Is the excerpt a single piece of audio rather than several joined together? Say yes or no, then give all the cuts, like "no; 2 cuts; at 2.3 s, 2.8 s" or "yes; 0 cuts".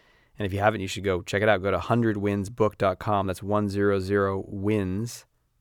yes; 0 cuts